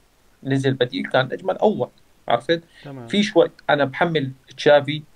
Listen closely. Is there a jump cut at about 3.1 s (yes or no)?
no